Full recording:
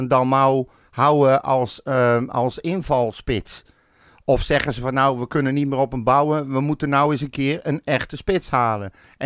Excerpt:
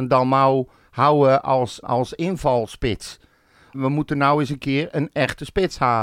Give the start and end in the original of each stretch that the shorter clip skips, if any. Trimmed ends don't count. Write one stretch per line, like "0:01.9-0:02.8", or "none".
0:01.8-0:02.3
0:04.2-0:06.5

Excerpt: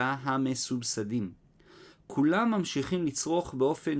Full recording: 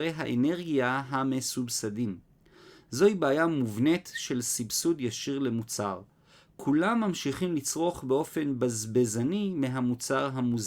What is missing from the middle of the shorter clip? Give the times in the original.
0:02.8-0:06.4

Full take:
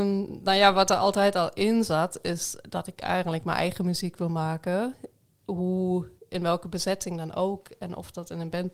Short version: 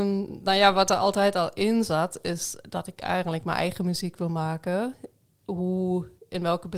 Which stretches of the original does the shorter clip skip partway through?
none

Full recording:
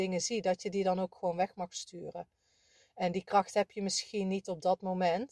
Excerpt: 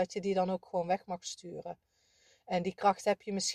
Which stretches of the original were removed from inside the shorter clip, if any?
none

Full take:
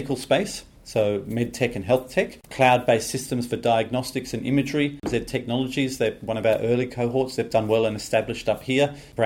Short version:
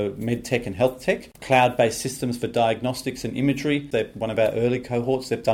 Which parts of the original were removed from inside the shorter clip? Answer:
0:05.0-0:06.0

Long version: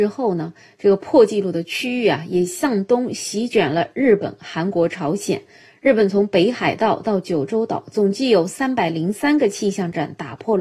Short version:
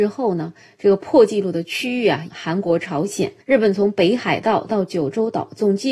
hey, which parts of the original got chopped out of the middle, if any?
0:02.3-0:04.4
0:05.5-0:05.8

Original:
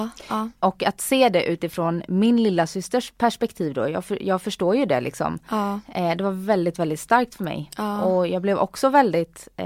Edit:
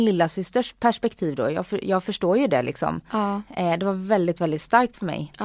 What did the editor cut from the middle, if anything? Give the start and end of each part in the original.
none

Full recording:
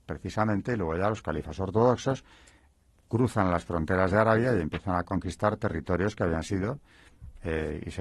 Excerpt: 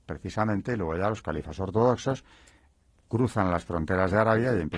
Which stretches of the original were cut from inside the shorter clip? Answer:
none

